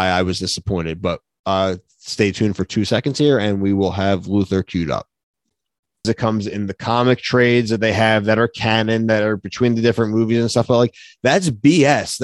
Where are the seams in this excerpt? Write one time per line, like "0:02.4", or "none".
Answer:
0:06.0